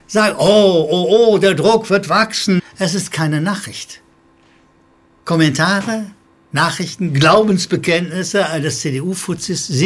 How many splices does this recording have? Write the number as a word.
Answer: one